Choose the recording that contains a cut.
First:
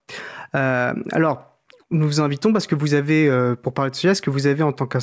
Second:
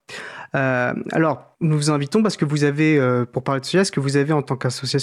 second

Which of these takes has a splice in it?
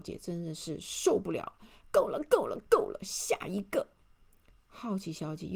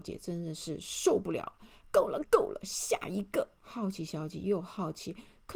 second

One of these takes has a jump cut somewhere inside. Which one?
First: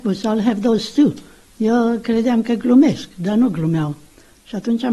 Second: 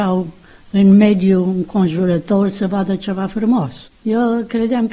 second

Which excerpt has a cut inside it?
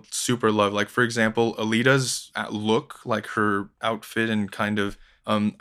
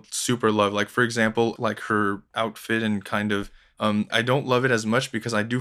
second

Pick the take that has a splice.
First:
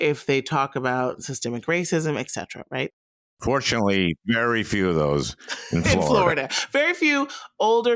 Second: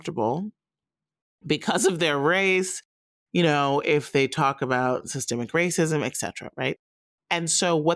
first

